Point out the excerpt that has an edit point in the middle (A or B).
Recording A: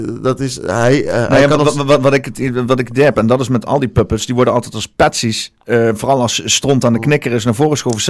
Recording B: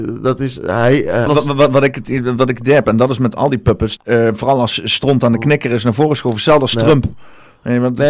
B